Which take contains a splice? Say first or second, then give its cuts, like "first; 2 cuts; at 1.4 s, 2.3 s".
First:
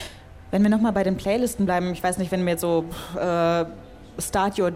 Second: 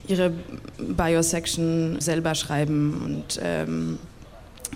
second; 1 cut; at 2.0 s